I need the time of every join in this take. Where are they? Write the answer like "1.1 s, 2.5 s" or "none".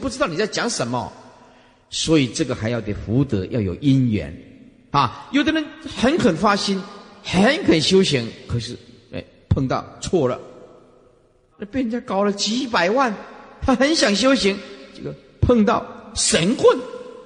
11.5 s